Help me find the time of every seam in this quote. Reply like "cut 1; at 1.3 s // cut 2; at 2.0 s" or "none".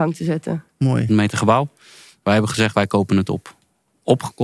cut 1; at 1.1 s

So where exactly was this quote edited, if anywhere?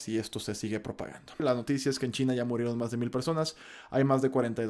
cut 1; at 1.4 s

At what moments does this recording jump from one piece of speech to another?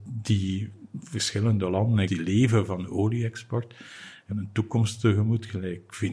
cut 1; at 2.1 s // cut 2; at 4.3 s

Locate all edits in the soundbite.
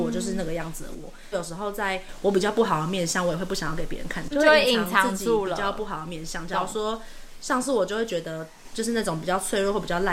cut 1; at 1.3 s // cut 2; at 4.3 s

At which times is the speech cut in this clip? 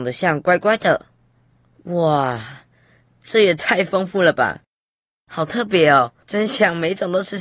cut 1; at 6.2 s

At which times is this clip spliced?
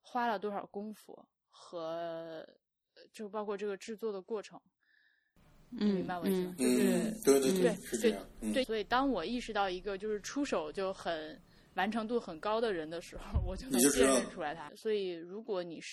cut 1; at 8.6 s // cut 2; at 14.7 s

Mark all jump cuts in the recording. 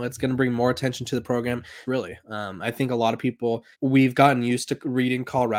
cut 1; at 1.8 s // cut 2; at 3.7 s

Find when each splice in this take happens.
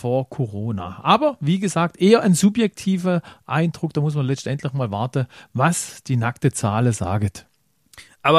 none

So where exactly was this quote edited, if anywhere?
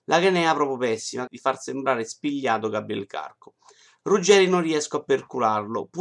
cut 1; at 1.3 s // cut 2; at 3.9 s

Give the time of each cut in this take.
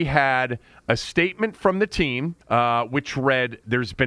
cut 1; at 2.4 s

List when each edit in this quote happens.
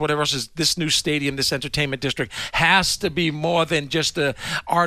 none

